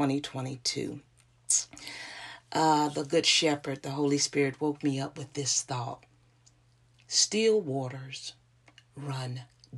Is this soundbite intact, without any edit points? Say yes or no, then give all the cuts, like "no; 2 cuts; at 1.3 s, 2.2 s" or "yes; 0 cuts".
yes; 0 cuts